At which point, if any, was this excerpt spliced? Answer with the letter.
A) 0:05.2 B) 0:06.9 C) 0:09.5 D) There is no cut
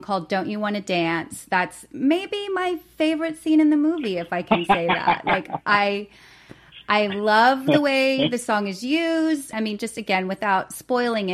C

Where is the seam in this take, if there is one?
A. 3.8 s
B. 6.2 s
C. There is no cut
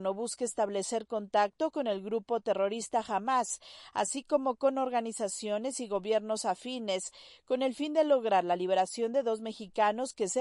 C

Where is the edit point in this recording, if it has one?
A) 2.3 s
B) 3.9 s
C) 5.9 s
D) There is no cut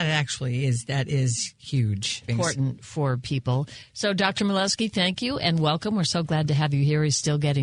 A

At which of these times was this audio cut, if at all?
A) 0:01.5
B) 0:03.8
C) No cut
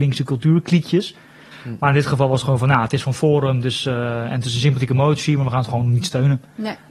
A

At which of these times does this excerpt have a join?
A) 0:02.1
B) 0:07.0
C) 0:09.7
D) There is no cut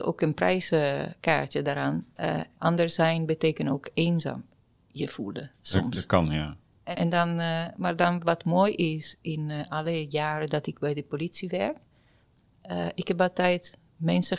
B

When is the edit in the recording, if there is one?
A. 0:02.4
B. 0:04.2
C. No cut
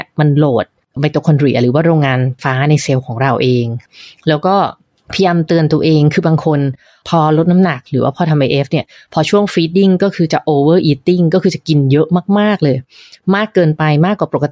A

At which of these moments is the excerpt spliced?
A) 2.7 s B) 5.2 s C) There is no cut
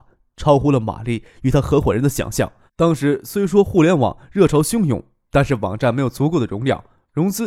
A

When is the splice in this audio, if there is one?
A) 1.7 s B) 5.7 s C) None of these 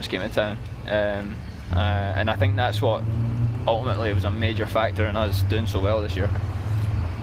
A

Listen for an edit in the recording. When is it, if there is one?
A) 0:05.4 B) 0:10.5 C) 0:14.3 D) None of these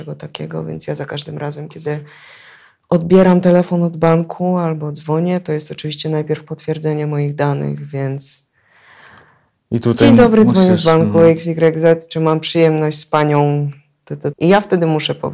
C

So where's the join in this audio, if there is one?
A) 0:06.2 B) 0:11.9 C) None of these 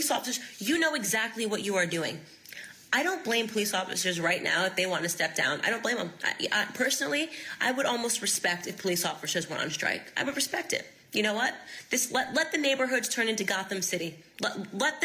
C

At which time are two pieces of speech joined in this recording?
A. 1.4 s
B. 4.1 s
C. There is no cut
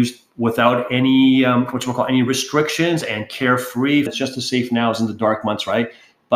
B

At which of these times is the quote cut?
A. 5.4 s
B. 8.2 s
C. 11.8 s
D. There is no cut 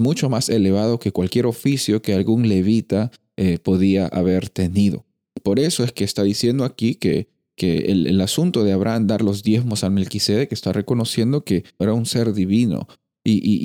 C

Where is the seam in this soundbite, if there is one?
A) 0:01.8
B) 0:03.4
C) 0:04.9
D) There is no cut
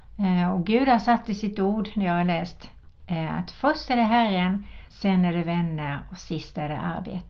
C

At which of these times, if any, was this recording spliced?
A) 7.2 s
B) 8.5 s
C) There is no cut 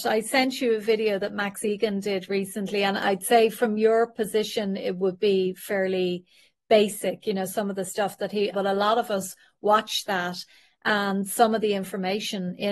B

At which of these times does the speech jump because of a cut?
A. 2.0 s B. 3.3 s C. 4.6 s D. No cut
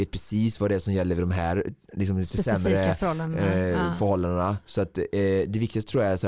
D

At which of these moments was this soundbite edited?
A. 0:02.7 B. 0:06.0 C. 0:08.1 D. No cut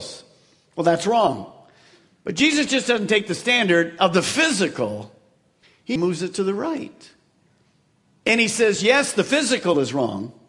B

